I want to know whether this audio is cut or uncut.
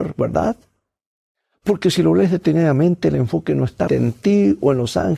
cut